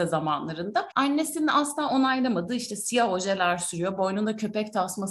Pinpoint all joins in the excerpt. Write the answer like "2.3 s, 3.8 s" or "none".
0.9 s